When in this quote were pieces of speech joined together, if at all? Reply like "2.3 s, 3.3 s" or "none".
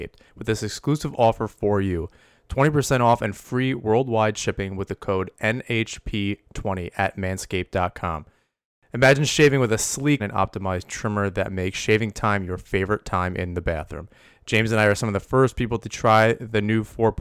10.2 s

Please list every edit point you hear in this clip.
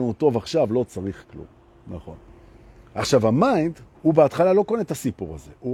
3.9 s

